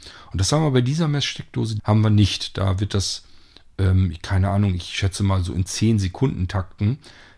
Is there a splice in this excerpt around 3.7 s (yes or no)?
no